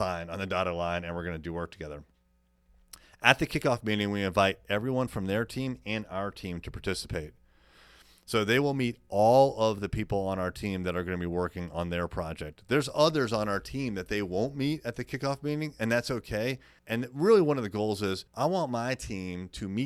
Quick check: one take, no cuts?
no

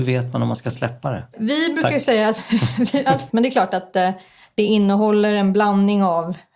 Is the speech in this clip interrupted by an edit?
yes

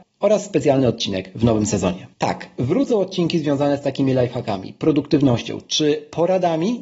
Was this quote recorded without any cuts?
no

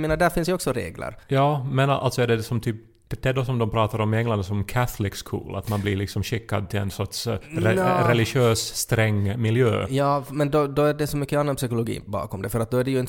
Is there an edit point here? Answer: yes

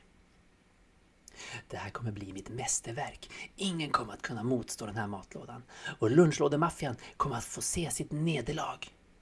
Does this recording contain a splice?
no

